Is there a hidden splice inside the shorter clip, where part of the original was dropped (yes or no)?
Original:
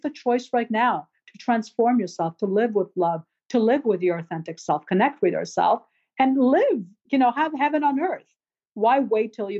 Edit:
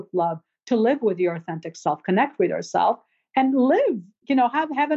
no